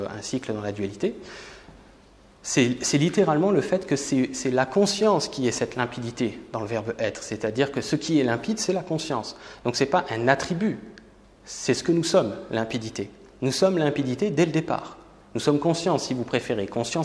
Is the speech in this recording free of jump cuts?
yes; 0 cuts

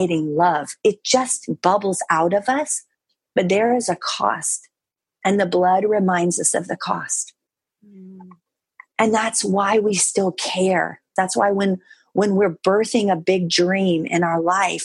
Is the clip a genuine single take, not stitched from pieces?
no; 1 cut; at 11.2 s

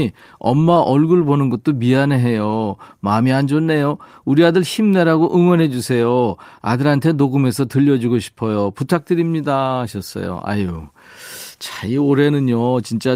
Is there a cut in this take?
no; 0 cuts

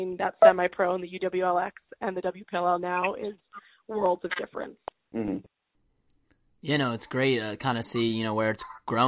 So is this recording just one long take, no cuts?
yes; 0 cuts

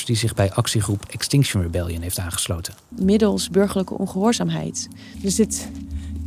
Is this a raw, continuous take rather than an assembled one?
no; 2 cuts; at 2.9 s, 5.1 s

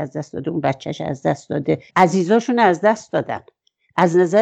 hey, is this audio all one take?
no; 1 cut; at 1.9 s

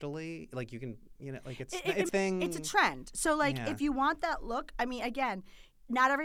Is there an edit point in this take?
yes; 1 cut; at 2.1 s

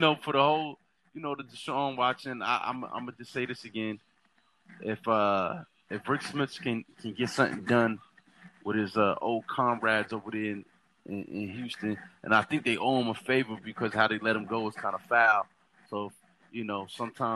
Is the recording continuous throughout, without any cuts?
yes; 0 cuts

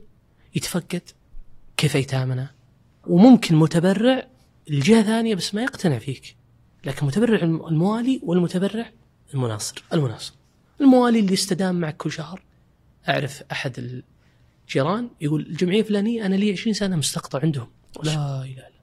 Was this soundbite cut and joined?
yes; 1 cut; at 3.0 s

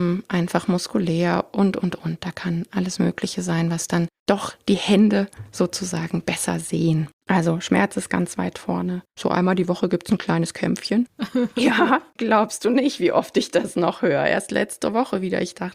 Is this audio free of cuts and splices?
no; 1 cut; at 9.1 s

